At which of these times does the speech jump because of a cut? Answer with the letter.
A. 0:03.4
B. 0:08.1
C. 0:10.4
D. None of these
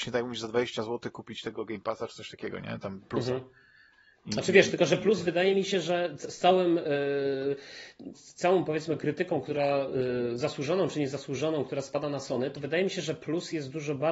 B